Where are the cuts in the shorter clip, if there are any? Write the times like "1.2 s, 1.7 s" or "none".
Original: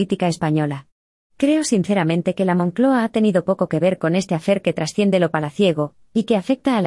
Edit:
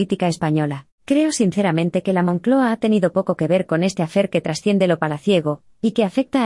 0.9 s